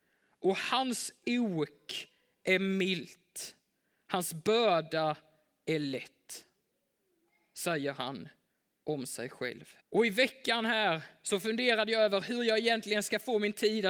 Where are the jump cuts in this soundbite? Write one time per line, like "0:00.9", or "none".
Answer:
0:09.8